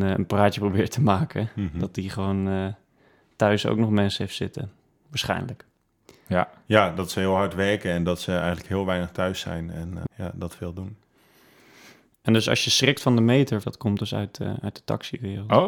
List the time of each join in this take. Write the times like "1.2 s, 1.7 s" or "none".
10.1 s, 13.6 s